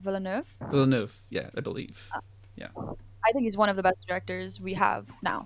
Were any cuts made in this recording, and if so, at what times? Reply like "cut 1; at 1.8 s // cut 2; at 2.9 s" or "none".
cut 1; at 1.5 s